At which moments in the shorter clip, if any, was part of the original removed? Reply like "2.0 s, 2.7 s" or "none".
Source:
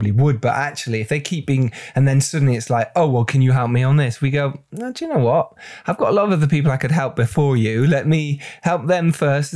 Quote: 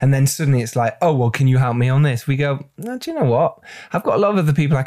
none